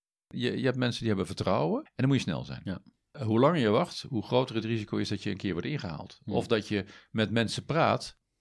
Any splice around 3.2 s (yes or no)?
no